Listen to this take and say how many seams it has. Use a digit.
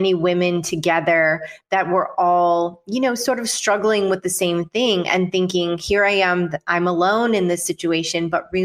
0